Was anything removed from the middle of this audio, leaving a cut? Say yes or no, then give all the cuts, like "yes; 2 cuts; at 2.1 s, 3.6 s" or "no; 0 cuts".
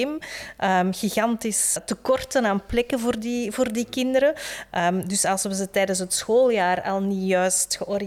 yes; 1 cut; at 1.8 s